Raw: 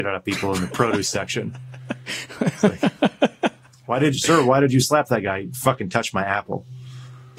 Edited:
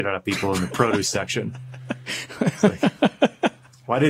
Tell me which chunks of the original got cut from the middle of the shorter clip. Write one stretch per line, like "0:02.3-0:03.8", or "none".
none